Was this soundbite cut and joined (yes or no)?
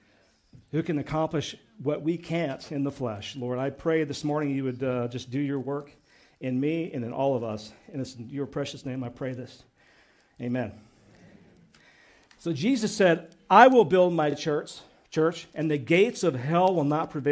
no